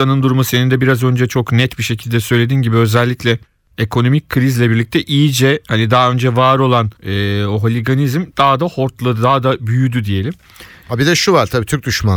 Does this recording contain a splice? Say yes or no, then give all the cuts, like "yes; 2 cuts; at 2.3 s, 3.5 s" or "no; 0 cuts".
yes; 2 cuts; at 7.0 s, 10.8 s